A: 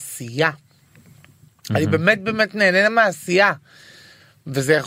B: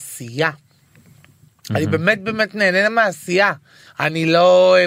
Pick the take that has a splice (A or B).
B